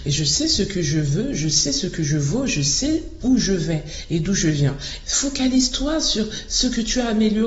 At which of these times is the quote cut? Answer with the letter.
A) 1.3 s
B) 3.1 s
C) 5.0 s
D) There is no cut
C